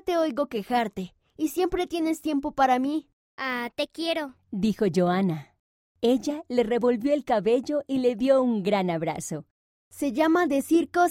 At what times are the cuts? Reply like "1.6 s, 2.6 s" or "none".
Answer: 9.7 s